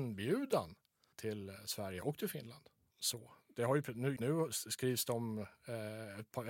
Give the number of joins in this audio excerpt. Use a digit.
3